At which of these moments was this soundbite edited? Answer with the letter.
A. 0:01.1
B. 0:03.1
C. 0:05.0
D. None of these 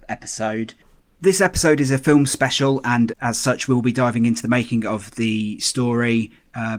B